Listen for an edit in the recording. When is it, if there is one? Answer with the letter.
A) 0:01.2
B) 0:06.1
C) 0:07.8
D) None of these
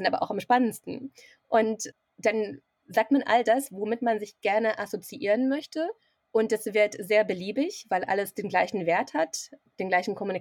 D